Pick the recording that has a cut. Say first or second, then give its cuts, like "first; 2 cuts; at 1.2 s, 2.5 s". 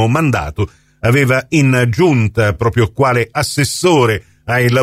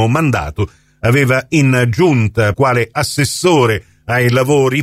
second; 1 cut; at 2.5 s